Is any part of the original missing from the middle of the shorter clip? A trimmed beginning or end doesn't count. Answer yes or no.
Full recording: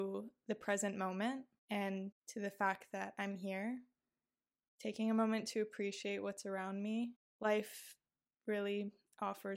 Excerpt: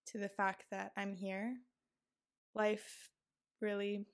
yes